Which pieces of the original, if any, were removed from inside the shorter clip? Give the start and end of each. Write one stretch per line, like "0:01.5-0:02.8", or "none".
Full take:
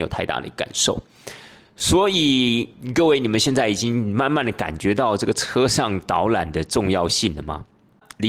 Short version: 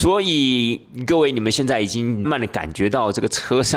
0:04.1-0:04.3